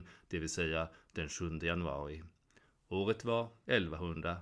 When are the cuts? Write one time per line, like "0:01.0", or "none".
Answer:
none